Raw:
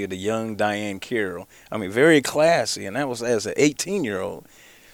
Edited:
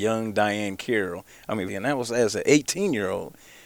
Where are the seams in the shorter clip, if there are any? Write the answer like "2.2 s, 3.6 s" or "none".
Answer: 1.7 s